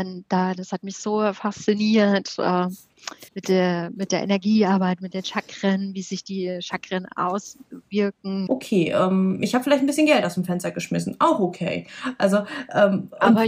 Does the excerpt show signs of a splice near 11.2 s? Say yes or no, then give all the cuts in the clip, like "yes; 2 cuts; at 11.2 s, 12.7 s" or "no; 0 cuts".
no; 2 cuts; at 3.3 s, 8.5 s